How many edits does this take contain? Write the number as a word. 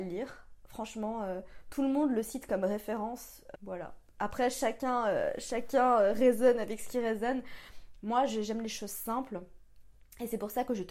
one